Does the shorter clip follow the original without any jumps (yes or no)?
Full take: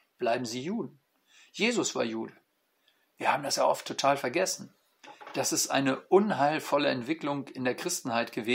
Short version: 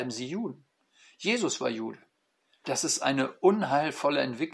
no